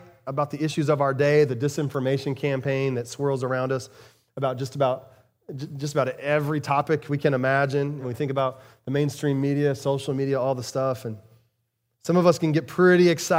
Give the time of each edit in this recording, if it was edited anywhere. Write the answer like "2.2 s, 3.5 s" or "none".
8.0 s